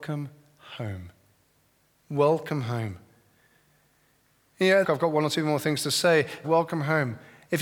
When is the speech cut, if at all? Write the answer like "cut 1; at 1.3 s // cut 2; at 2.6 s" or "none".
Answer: cut 1; at 4.8 s // cut 2; at 6.4 s

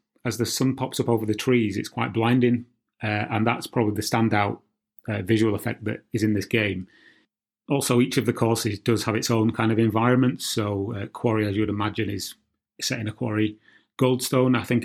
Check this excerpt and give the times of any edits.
none

